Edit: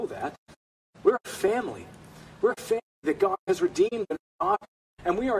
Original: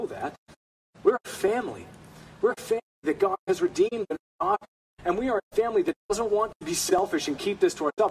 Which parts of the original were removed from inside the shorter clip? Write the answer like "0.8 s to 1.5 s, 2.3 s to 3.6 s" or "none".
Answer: none